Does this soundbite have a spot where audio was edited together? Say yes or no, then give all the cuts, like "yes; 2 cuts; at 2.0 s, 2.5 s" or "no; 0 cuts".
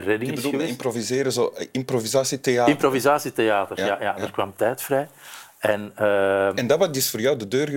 no; 0 cuts